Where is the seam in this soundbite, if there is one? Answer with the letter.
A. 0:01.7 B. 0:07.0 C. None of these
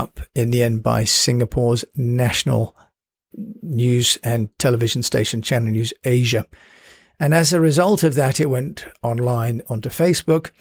C